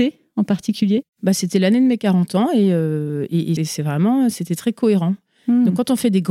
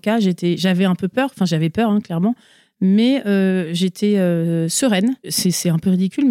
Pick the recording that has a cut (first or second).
first